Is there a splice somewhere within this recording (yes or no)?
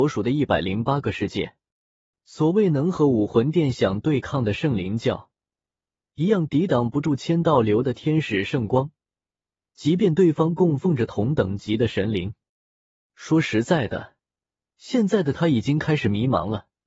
yes